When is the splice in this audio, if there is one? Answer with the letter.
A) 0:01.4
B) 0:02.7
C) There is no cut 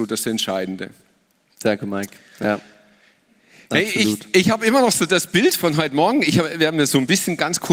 C